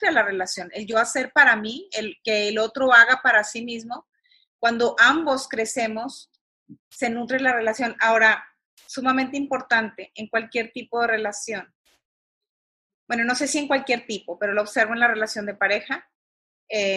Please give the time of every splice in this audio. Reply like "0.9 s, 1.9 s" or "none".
none